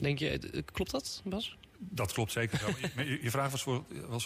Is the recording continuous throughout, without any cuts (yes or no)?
no